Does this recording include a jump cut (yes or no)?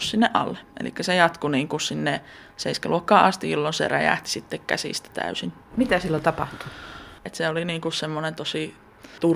yes